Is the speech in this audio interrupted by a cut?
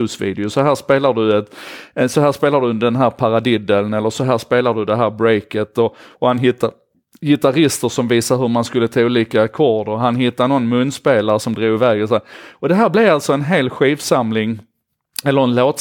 no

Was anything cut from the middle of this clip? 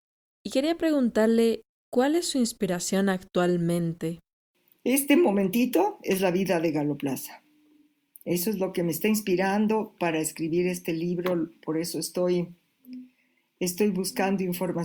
no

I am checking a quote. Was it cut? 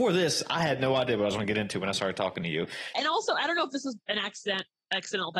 yes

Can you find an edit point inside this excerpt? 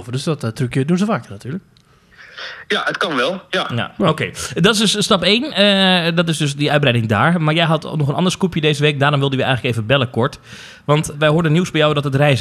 yes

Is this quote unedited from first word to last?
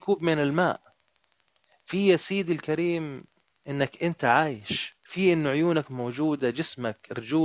no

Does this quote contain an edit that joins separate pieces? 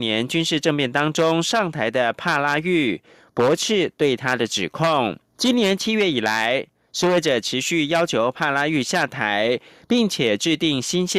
yes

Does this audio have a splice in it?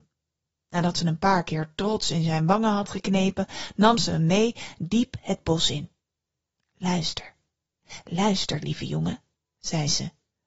no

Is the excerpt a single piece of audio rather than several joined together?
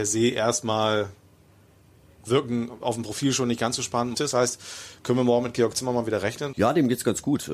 no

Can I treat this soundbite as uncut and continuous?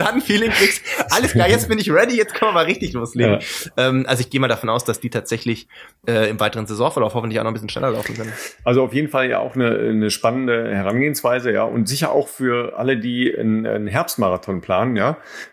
yes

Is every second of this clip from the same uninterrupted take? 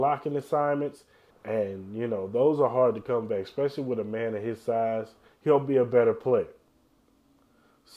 no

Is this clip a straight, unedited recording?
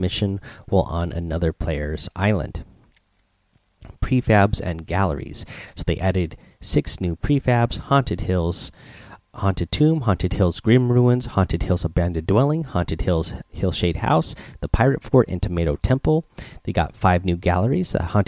no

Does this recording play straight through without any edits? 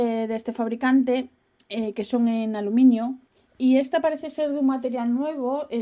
yes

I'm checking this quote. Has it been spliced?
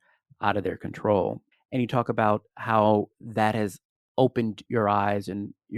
yes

